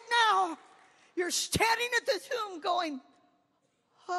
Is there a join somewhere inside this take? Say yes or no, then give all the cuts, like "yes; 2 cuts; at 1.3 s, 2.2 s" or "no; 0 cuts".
no; 0 cuts